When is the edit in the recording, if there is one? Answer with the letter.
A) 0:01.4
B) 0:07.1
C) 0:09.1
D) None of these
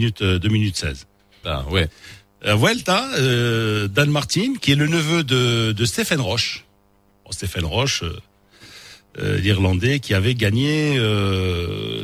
A